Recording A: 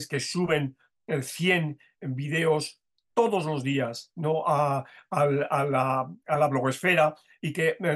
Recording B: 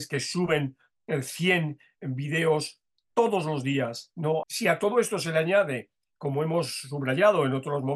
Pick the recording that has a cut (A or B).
B